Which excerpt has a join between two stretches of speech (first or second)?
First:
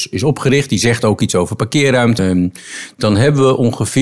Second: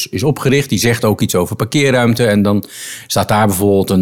first